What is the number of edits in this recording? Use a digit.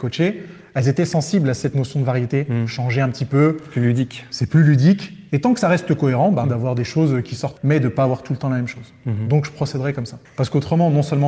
3